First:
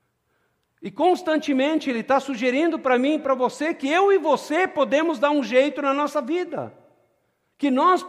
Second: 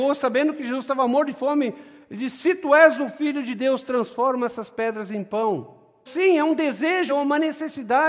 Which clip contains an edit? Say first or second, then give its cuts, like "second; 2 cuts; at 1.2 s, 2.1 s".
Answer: second; 2 cuts; at 6.1 s, 7.1 s